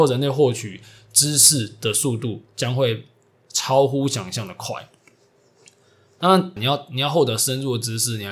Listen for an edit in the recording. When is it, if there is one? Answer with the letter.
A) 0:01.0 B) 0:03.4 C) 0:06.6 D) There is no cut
C